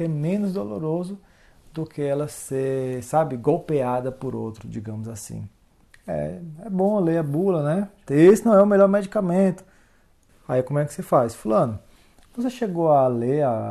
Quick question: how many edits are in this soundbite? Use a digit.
3